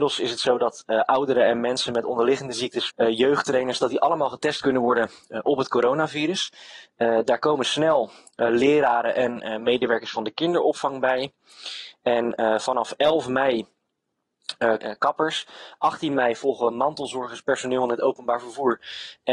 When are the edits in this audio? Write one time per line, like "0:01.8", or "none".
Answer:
0:02.9
0:14.8